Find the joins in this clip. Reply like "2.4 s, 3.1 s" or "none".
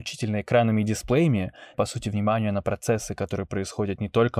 1.7 s